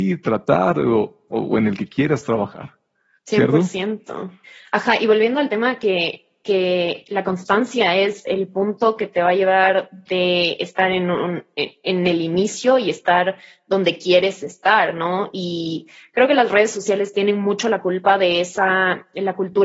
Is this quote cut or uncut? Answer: uncut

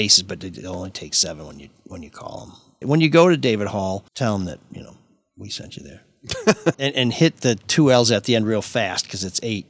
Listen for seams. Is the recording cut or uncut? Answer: cut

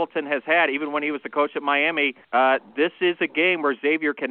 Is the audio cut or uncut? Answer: cut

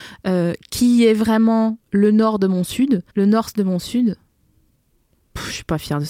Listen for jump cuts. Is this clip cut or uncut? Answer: cut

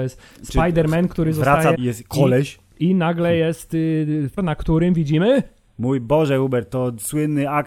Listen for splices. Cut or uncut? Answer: cut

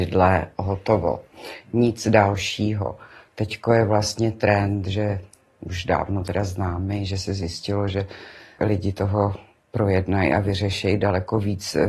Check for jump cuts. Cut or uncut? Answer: cut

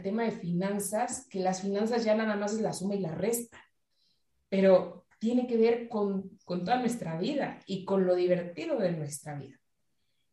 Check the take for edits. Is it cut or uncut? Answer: uncut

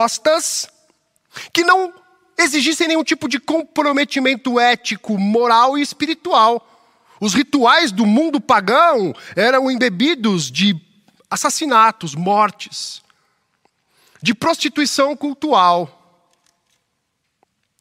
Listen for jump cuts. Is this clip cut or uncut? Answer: uncut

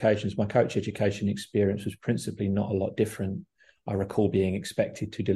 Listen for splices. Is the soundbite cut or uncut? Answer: uncut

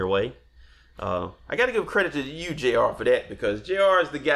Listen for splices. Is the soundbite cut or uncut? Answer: uncut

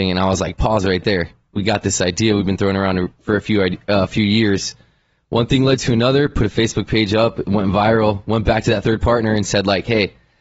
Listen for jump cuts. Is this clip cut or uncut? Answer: uncut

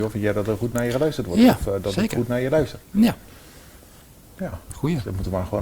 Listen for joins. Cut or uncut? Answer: uncut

